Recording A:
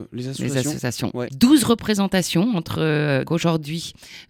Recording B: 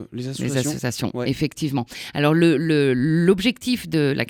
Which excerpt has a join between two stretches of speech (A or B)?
A